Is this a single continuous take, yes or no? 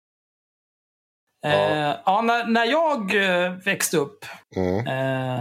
no